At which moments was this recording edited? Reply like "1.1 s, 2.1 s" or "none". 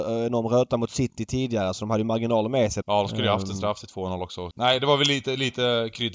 2.8 s, 4.5 s